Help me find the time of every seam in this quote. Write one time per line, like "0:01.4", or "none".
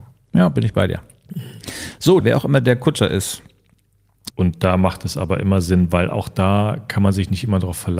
0:02.2
0:04.3